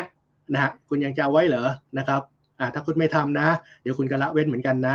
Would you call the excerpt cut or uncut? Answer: cut